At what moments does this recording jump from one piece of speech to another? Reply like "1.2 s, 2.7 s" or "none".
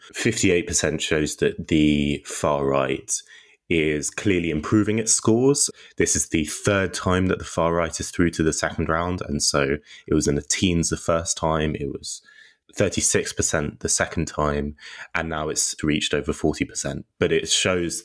none